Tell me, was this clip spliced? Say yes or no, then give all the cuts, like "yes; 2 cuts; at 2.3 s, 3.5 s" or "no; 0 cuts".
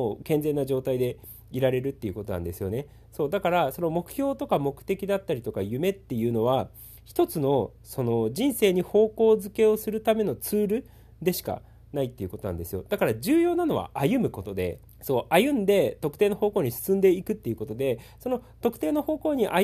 yes; 1 cut; at 14.9 s